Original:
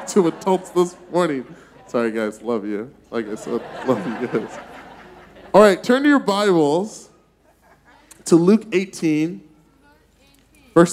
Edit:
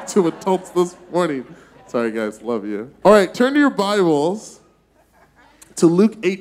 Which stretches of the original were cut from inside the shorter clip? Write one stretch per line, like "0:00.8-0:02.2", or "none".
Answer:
0:03.0-0:05.5